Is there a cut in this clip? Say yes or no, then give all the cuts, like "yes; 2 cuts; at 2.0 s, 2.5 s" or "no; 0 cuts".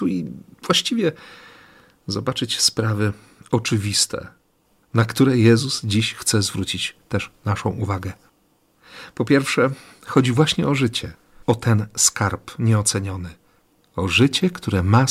no; 0 cuts